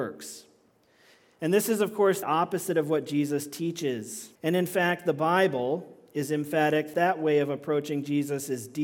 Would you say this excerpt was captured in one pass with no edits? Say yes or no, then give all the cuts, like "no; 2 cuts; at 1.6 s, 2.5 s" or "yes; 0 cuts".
no; 3 cuts; at 2.2 s, 4.4 s, 6.9 s